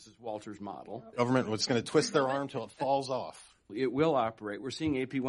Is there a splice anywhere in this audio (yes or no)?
yes